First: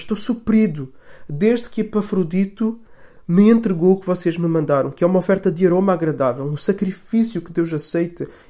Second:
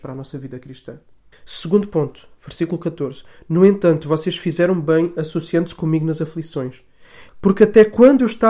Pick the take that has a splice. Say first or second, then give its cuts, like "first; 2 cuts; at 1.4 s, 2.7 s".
second; 2 cuts; at 1.3 s, 7.3 s